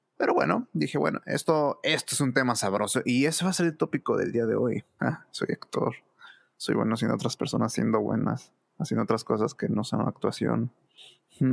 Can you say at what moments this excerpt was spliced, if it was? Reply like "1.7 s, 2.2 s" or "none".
5.0 s